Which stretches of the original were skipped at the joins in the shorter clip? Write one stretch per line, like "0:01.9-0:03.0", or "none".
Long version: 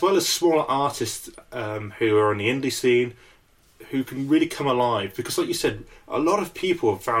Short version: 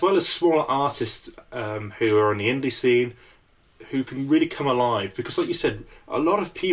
none